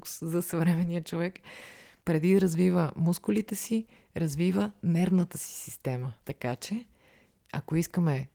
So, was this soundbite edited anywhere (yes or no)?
yes